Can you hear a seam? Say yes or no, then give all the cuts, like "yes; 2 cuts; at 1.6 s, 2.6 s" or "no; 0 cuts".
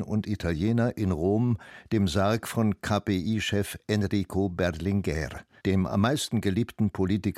yes; 1 cut; at 5.6 s